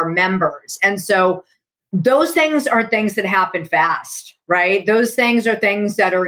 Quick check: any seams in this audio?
no; 0 cuts

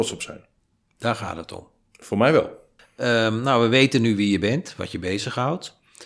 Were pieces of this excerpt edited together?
no; 0 cuts

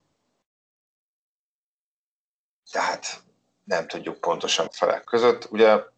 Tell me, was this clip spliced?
yes; 1 cut; at 4.7 s

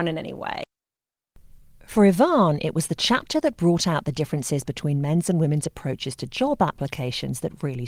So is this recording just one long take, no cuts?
yes; 0 cuts

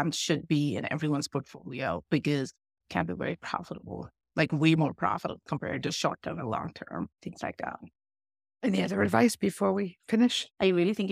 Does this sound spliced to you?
no; 0 cuts

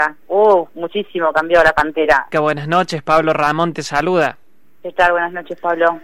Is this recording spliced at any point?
yes; 1 cut; at 2.3 s

